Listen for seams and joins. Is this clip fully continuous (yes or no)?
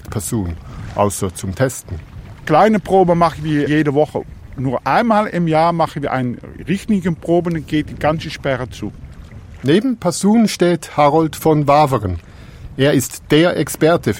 yes